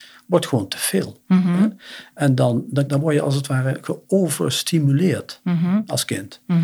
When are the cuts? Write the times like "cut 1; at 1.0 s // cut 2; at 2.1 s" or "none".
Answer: cut 1; at 2.9 s